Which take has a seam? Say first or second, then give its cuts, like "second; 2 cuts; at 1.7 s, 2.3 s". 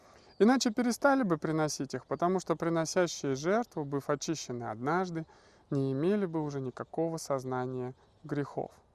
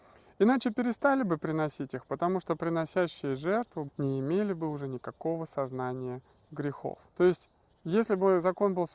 second; 2 cuts; at 3.9 s, 7.1 s